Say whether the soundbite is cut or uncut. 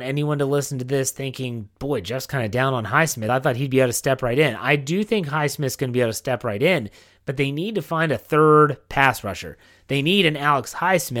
uncut